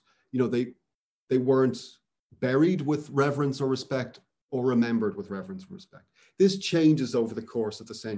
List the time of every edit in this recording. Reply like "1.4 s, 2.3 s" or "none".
none